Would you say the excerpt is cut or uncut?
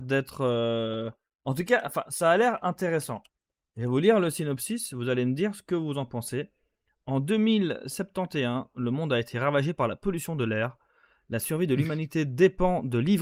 uncut